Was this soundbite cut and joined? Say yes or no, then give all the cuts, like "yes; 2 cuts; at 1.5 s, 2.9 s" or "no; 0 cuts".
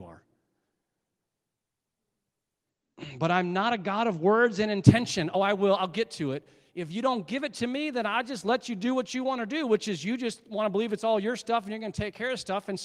no; 0 cuts